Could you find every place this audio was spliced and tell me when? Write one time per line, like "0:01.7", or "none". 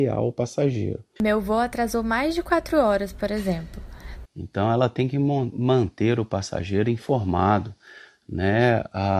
0:01.2
0:04.2